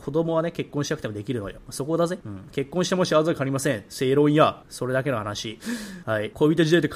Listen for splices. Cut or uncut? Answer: uncut